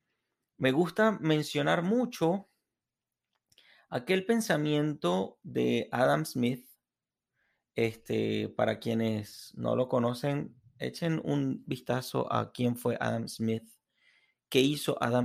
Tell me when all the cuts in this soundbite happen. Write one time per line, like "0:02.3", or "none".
none